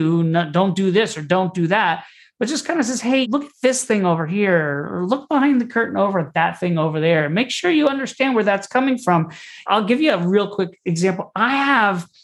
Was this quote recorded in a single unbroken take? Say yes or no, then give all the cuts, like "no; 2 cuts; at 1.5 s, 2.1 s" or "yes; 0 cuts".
no; 1 cut; at 3.2 s